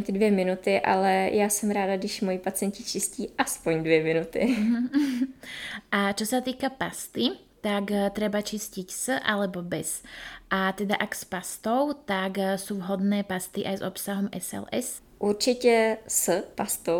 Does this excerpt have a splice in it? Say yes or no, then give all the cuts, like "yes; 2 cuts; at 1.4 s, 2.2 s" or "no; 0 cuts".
no; 0 cuts